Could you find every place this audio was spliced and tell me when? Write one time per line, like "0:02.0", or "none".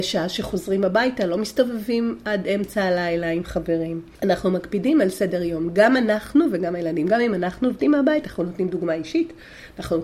none